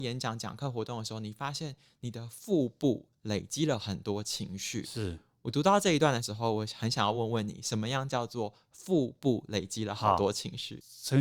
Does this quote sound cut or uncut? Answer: uncut